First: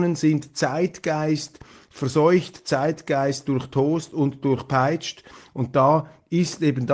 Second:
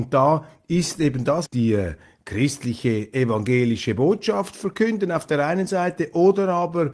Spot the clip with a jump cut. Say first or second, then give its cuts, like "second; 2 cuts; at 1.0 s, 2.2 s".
second; 1 cut; at 1.5 s